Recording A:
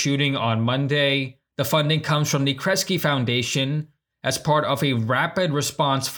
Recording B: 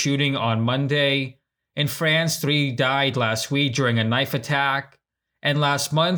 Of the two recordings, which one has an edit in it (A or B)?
A